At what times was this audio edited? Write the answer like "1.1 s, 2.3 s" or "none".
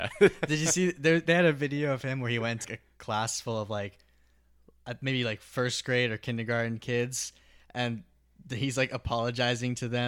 2.6 s